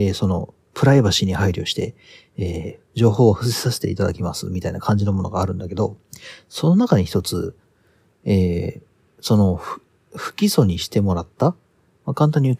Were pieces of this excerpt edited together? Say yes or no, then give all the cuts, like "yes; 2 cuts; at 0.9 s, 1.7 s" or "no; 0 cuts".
no; 0 cuts